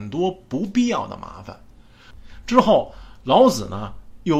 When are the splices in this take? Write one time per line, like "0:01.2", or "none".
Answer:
0:02.1